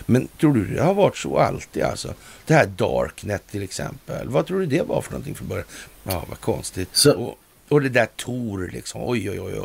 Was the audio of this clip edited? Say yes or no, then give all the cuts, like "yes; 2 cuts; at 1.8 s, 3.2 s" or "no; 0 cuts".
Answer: yes; 1 cut; at 5.9 s